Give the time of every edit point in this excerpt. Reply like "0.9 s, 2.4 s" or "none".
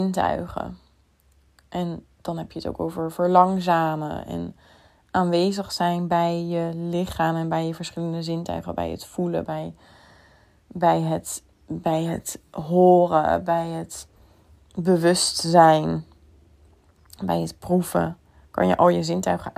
9.4 s